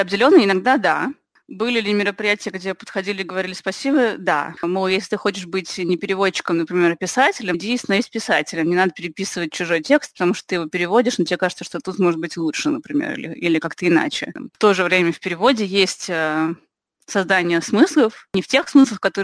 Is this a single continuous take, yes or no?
no